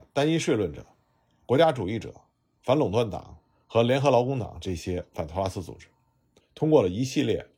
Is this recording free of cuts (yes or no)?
no